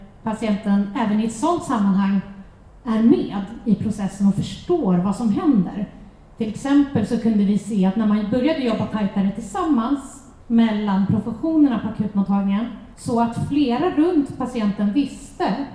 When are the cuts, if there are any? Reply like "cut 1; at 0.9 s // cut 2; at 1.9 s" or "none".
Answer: cut 1; at 10.4 s // cut 2; at 12.9 s